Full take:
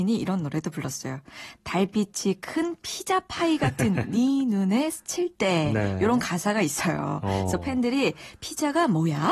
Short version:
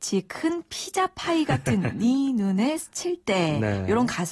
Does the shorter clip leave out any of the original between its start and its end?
no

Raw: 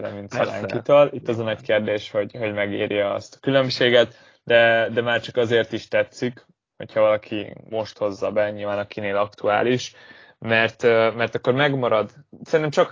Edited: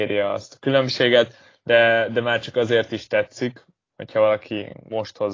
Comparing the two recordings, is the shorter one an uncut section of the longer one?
yes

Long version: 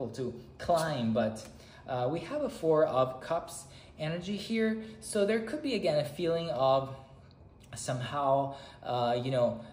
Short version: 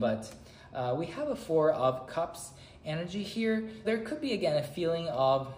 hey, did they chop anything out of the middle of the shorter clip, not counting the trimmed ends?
yes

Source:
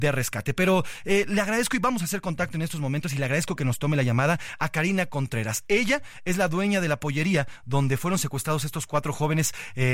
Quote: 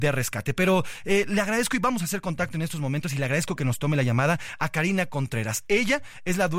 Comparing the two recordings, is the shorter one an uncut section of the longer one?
yes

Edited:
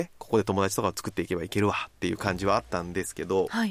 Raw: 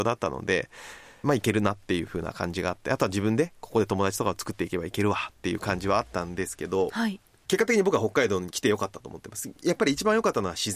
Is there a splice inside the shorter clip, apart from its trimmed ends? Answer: no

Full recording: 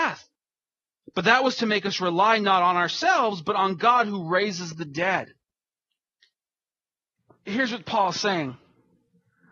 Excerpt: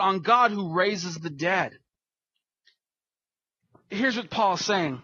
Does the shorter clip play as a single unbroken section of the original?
yes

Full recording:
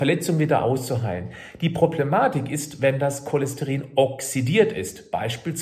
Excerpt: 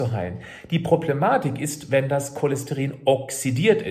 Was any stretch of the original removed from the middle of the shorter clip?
no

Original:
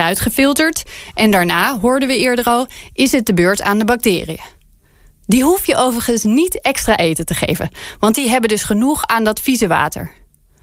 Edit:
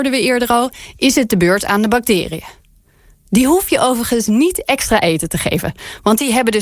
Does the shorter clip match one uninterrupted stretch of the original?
yes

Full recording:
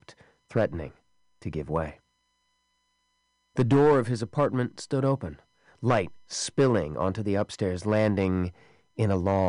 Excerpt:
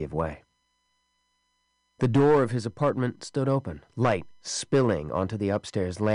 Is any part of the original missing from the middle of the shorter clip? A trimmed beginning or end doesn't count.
yes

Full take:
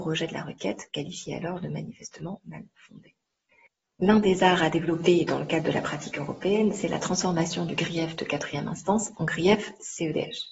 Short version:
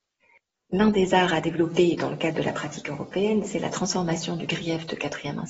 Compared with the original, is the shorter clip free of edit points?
yes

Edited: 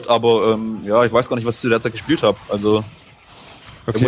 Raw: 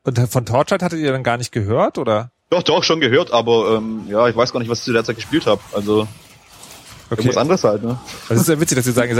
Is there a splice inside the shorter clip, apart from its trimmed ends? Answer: no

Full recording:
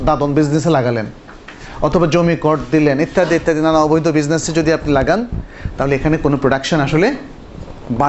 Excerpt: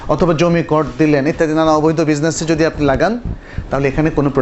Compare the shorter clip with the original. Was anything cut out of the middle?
yes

